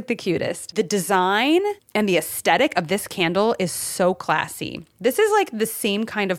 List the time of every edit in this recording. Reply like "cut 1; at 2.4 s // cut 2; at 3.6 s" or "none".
none